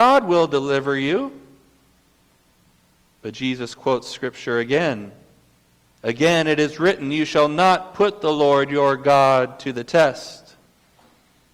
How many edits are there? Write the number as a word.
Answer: zero